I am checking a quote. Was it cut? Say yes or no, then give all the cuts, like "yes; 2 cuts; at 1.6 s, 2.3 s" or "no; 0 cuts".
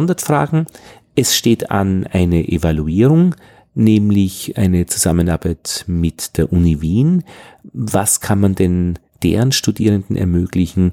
no; 0 cuts